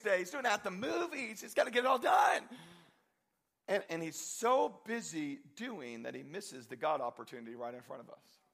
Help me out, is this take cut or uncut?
cut